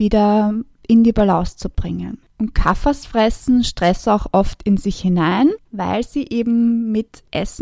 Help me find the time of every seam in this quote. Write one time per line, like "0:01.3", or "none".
0:05.6